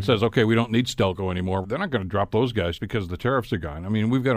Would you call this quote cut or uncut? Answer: cut